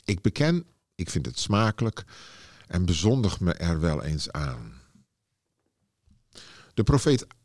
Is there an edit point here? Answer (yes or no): no